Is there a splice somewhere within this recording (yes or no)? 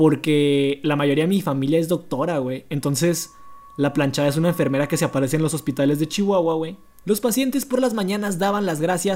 yes